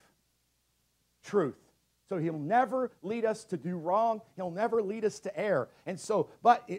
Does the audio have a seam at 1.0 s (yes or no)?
yes